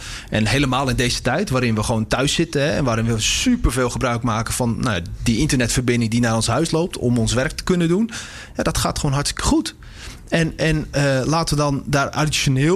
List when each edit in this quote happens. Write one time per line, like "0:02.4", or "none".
none